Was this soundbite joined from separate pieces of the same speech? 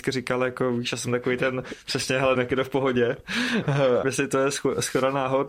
yes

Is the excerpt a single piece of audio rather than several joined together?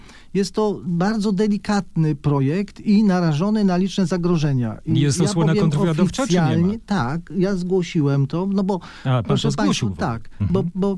yes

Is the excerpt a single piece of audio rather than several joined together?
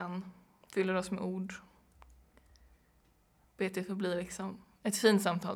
yes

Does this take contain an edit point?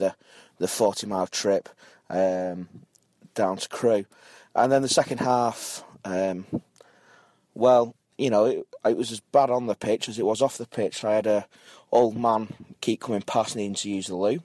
no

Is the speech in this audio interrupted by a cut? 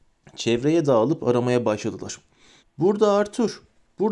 yes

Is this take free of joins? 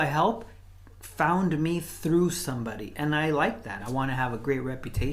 no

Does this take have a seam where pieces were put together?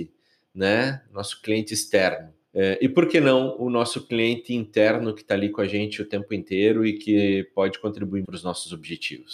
yes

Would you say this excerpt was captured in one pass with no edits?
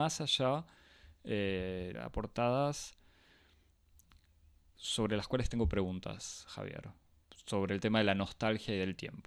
no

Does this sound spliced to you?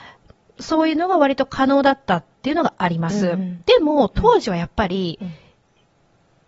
no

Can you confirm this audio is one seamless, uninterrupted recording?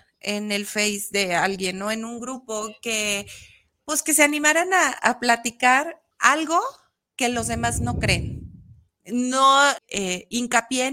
no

